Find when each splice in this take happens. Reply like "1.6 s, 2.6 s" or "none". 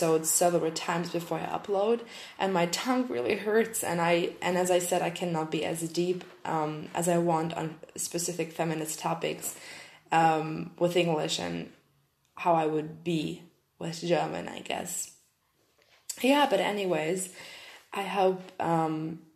none